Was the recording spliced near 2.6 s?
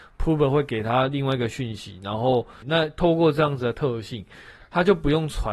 yes; 1 cut; at 2.6 s

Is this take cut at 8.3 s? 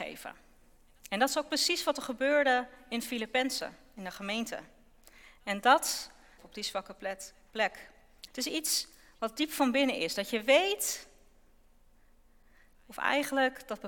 yes; 2 cuts; at 6.4 s, 8.3 s

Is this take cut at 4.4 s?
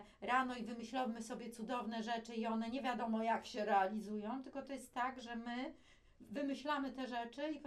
no; 0 cuts

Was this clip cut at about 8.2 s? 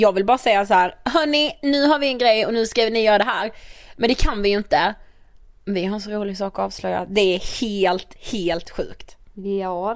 yes; 1 cut; at 8.2 s

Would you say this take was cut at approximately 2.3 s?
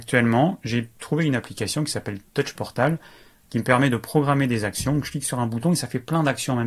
yes; 1 cut; at 2.3 s

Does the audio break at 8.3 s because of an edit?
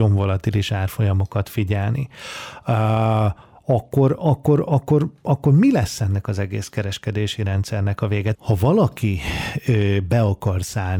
yes; 1 cut; at 8.3 s

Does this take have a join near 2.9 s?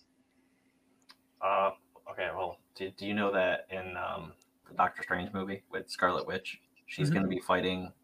no; 1 cut; at 4.6 s

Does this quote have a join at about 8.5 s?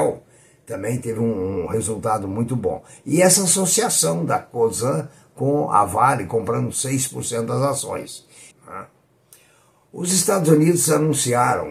yes; 1 cut; at 8.5 s

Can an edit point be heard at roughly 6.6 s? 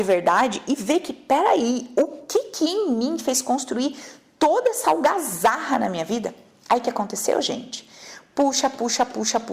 no; 0 cuts

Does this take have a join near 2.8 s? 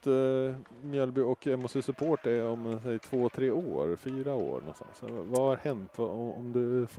no; 0 cuts

